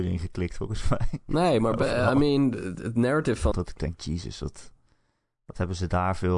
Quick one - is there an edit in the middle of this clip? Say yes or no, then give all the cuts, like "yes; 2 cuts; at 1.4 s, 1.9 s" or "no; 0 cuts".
yes; 1 cut; at 3.5 s